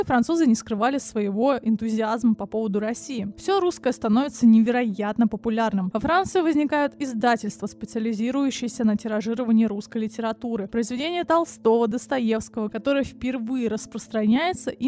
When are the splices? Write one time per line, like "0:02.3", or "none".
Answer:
0:05.9
0:12.7